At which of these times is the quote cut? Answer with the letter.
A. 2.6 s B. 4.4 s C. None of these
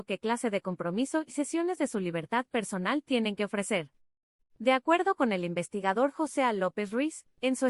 B